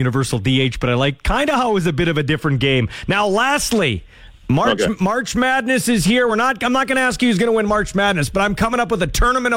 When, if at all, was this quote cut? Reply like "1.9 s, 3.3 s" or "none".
none